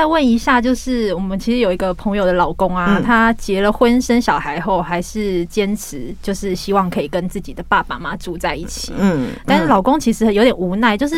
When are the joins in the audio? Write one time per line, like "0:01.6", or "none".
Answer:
0:08.0
0:09.4

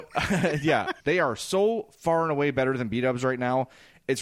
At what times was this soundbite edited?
0:01.0

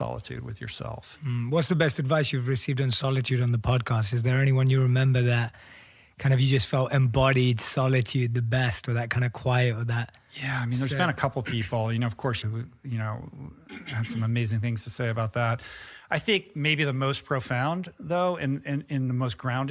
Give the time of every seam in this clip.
0:12.4

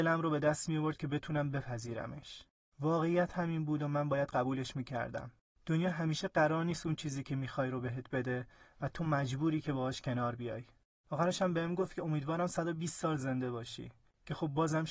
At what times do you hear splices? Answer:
0:11.0

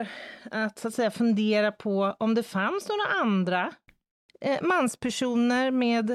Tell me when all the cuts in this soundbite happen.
none

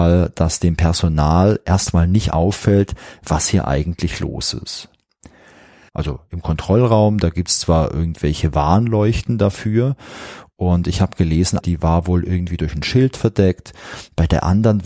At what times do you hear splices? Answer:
0:05.9
0:11.6

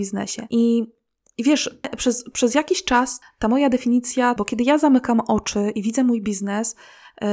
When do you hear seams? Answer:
0:03.2
0:04.4

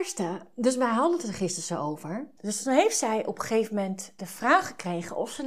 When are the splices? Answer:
0:02.4
0:04.2

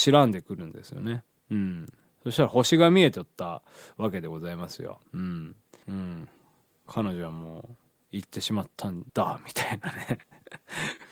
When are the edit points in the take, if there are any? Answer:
0:05.8
0:09.1

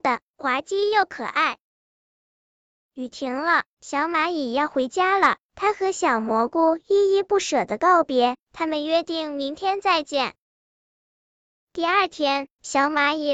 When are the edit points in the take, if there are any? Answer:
none

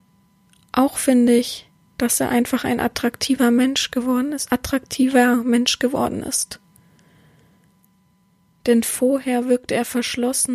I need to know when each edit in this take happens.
none

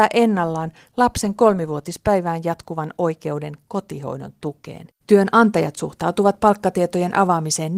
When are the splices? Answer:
0:05.0

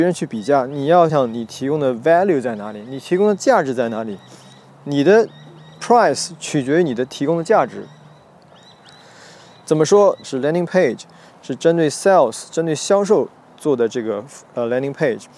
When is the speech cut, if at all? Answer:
0:01.1
0:10.2

